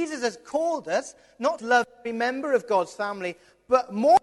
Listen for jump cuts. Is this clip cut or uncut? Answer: cut